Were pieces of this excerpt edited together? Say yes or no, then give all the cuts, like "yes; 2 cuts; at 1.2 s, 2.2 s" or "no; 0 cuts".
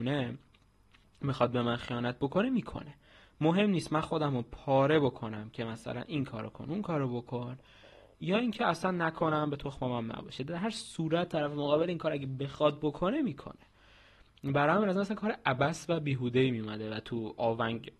no; 0 cuts